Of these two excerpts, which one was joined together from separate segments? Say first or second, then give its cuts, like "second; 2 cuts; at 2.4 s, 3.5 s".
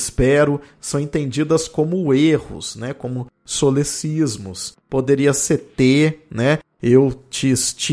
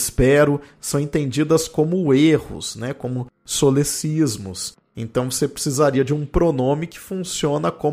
first; 1 cut; at 4.8 s